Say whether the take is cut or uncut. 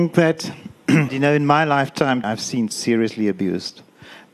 cut